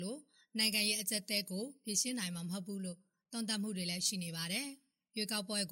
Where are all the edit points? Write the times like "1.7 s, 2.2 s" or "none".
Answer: none